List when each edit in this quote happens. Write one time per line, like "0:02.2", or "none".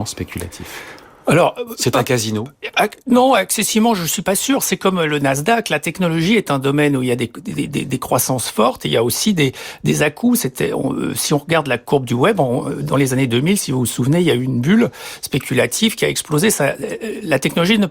none